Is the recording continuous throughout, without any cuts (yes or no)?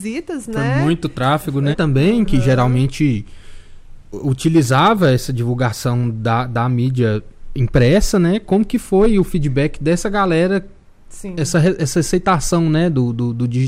no